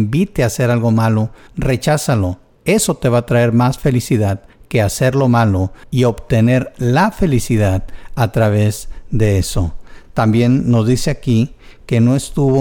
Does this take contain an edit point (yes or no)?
no